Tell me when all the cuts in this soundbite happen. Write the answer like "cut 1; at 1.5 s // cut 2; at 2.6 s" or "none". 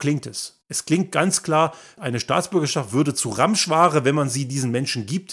cut 1; at 2.0 s